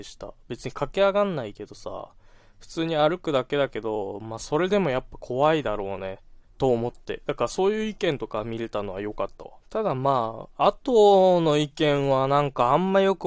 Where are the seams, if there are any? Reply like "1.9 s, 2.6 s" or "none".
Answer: 6.4 s, 9.6 s

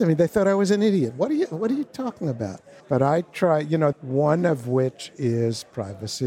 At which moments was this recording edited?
2.8 s, 3.9 s

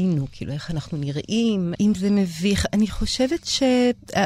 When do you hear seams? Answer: 1.7 s

